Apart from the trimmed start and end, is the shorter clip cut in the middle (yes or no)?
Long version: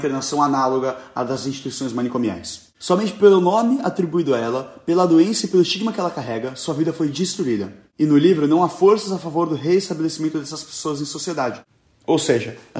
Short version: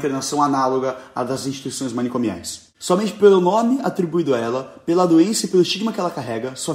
no